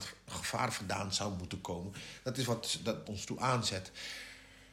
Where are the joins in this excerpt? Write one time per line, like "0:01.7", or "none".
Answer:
0:03.0